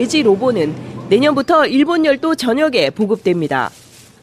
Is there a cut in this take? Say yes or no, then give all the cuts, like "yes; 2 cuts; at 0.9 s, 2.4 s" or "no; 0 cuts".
no; 0 cuts